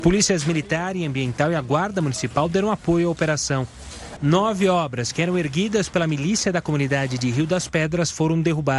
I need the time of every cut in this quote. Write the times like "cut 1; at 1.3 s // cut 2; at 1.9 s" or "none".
cut 1; at 4.2 s